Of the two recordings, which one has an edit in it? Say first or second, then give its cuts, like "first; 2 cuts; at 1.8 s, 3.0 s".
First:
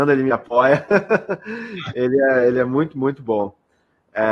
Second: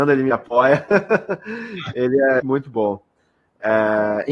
second; 1 cut; at 2.4 s